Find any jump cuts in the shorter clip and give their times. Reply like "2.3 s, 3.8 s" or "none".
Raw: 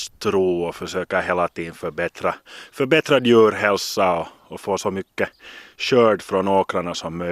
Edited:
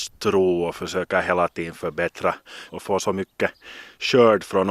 2.7 s